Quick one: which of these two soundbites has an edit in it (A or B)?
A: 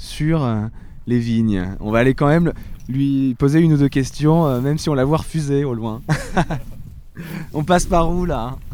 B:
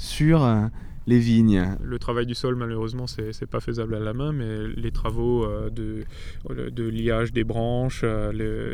B